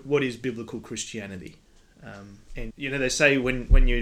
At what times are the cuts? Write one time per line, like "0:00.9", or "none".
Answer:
0:02.7